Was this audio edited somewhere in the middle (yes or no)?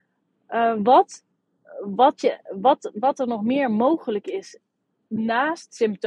no